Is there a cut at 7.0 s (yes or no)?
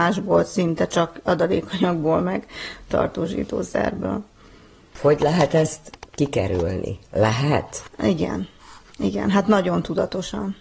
no